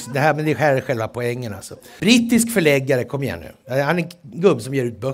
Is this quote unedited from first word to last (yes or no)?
no